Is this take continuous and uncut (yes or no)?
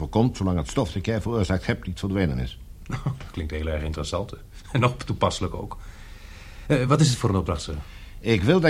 yes